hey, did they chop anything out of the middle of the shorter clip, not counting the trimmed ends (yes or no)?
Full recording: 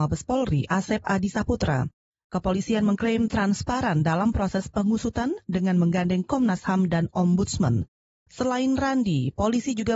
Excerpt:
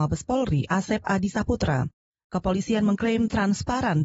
no